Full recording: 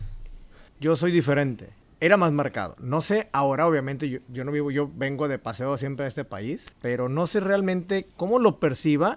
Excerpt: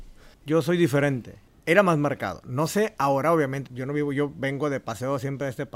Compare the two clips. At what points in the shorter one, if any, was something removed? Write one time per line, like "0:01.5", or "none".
0:03.7